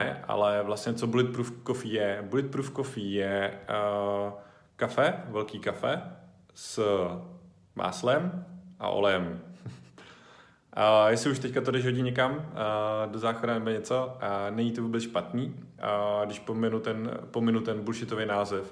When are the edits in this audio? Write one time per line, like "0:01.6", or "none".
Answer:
0:15.8